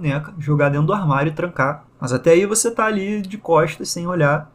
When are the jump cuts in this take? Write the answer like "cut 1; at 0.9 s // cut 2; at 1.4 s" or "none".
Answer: cut 1; at 1.9 s